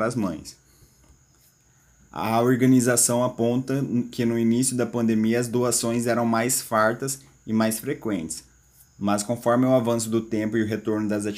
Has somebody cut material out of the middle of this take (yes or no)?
no